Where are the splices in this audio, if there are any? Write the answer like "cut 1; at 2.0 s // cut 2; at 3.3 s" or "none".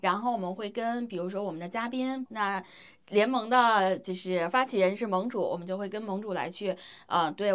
cut 1; at 2.3 s